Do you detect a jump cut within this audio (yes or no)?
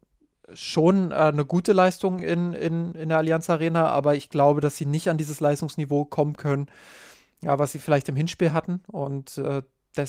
no